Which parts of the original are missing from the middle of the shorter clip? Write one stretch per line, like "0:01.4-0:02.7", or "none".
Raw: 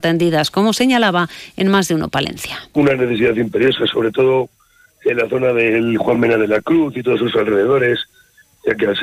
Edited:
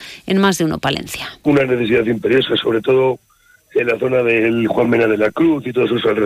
none